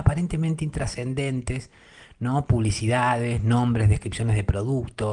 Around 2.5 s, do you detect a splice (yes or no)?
no